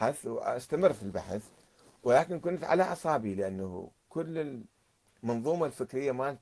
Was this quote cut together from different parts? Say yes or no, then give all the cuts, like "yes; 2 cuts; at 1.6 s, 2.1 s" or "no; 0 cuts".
no; 0 cuts